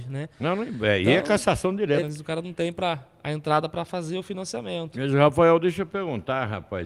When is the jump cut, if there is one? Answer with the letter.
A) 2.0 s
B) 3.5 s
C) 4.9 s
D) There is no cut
A